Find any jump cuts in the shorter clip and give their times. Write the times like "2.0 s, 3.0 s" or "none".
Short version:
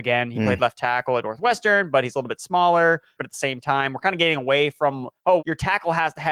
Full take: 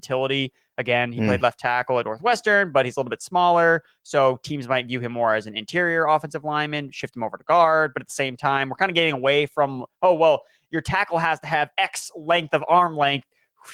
3.2 s, 5.4 s